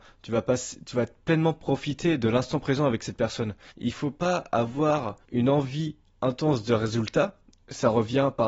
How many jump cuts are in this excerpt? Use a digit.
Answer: 2